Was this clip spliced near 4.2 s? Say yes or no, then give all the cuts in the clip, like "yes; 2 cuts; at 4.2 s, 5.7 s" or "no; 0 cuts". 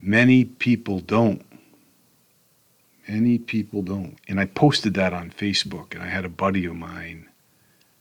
yes; 1 cut; at 4.2 s